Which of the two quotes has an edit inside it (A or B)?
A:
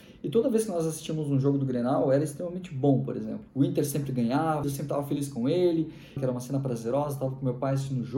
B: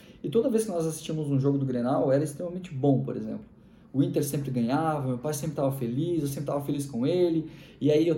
A